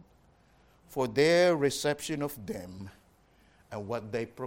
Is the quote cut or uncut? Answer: uncut